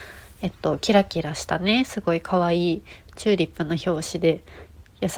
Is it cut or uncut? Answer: uncut